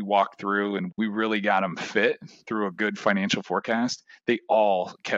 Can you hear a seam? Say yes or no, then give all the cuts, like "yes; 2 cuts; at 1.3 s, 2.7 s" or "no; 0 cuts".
yes; 1 cut; at 0.9 s